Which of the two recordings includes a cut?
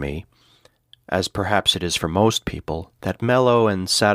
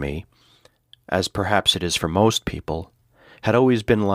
first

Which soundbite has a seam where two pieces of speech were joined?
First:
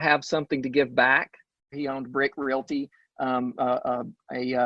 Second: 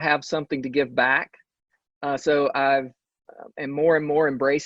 first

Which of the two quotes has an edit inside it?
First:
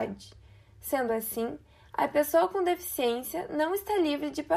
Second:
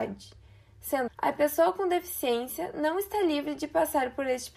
second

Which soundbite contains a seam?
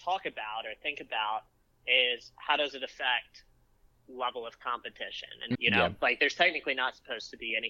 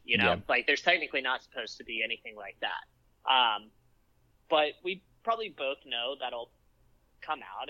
first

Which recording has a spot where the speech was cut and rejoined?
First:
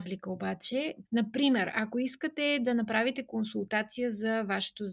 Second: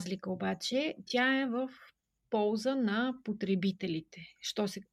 first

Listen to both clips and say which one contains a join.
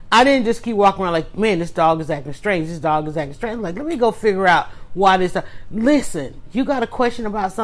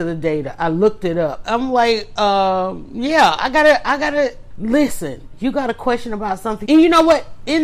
second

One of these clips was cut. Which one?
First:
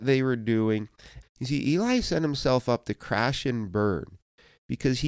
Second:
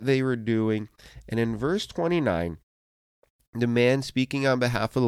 first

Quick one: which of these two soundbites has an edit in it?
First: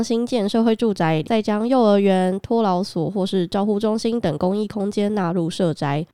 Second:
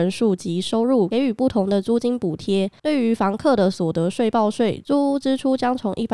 first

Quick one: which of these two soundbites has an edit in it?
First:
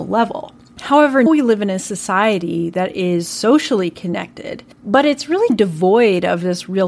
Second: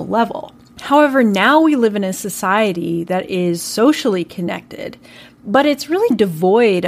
first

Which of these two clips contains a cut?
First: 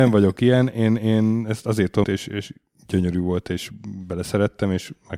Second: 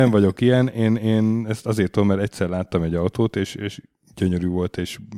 first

